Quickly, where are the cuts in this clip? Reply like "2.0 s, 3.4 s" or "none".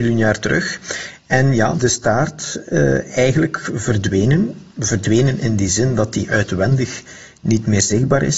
1.8 s